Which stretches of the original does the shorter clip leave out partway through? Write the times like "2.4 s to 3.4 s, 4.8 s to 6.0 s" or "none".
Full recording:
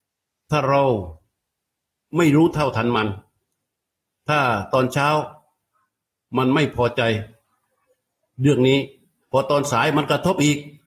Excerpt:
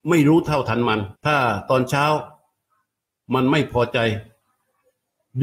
3.2 s to 4.2 s

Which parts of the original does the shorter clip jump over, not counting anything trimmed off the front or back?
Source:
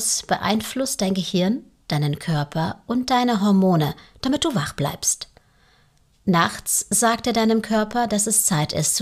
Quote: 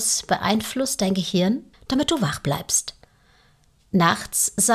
1.7 s to 4.1 s

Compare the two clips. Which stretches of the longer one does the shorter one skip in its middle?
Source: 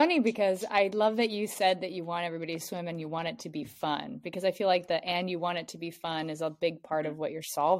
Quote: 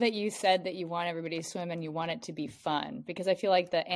none

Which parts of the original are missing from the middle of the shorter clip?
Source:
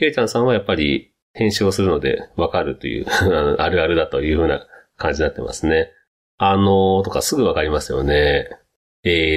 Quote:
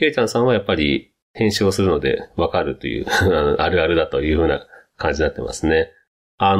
none

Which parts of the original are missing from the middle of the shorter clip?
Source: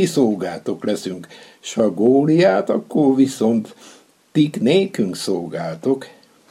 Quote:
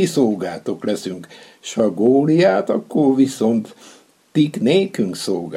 none

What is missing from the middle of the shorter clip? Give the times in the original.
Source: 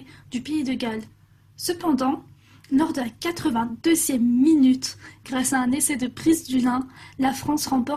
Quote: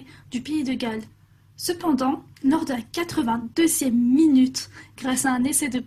2.3 s to 2.6 s

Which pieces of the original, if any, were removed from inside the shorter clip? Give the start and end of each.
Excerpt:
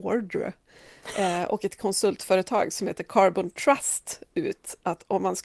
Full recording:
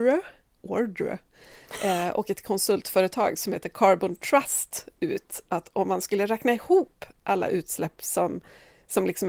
none

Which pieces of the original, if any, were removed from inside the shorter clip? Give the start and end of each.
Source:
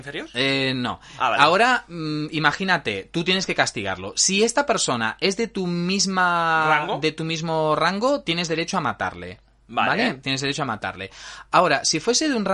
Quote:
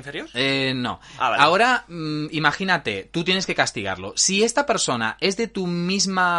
none

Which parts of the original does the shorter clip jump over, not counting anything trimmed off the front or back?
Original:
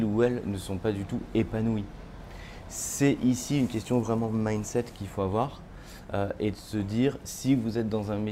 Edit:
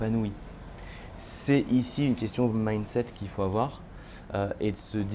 4.0 s to 4.3 s

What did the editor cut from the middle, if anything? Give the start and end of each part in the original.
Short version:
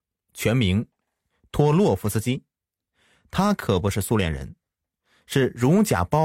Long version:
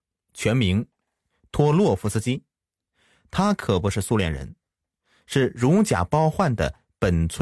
none

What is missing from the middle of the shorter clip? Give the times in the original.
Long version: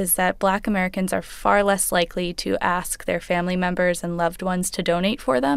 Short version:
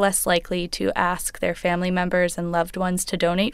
none

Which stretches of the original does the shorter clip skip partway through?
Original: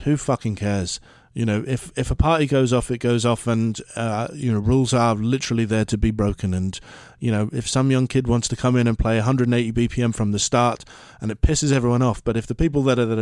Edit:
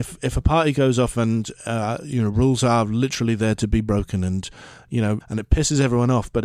2.9 s to 3.4 s, 7.5 s to 11.1 s

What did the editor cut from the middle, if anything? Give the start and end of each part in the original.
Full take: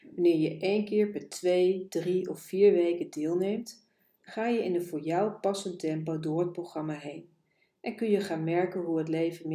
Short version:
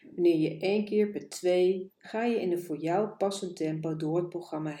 1.9 s to 4.1 s

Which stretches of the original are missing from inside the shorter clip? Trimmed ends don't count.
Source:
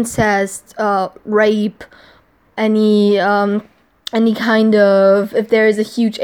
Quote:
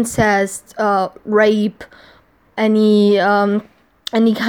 none

